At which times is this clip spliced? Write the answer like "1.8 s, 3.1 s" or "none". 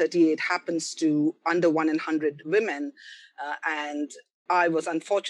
none